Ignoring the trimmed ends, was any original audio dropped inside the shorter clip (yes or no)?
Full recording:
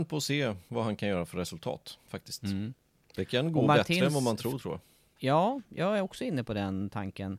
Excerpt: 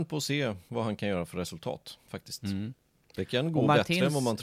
no